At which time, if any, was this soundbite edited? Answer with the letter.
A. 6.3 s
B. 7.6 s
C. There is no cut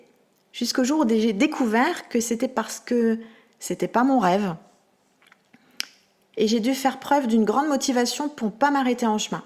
A